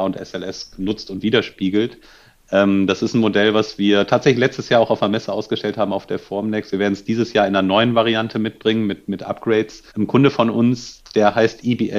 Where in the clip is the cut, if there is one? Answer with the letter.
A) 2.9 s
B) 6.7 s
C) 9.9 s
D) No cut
C